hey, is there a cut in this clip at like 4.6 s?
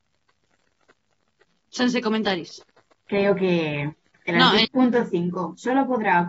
yes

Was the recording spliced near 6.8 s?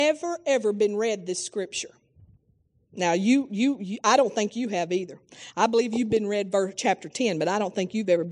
no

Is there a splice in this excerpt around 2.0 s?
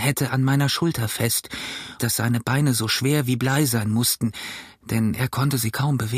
yes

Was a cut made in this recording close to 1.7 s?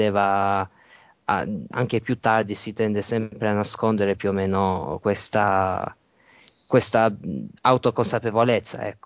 yes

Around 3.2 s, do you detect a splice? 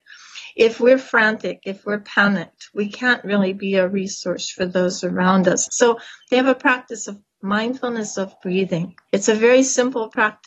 no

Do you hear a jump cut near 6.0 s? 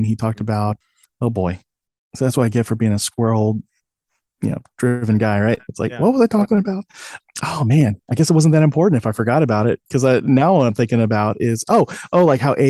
no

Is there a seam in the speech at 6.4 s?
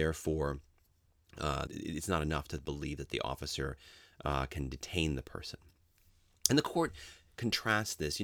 no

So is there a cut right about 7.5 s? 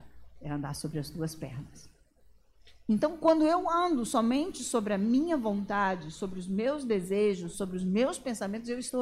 yes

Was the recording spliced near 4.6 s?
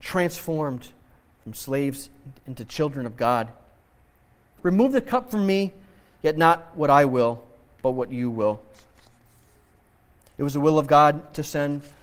yes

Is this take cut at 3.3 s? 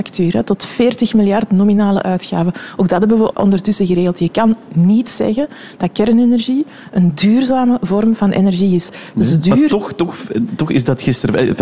yes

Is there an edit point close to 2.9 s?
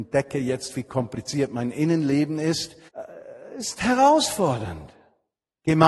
yes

